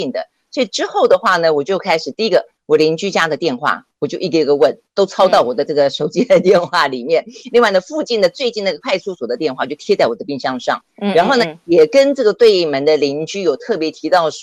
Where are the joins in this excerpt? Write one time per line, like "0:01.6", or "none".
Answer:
none